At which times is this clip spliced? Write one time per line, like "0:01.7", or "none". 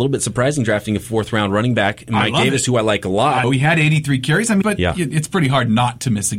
0:03.4
0:04.6